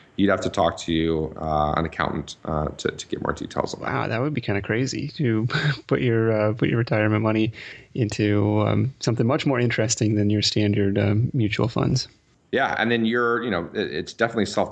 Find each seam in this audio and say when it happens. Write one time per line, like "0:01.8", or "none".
none